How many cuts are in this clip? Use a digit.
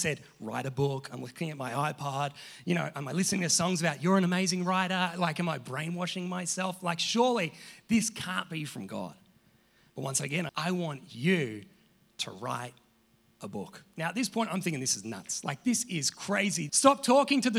2